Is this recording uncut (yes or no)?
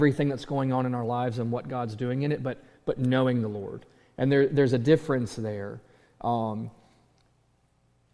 yes